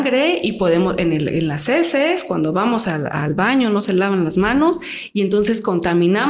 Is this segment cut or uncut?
uncut